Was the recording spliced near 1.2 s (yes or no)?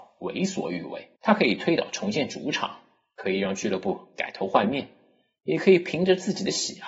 yes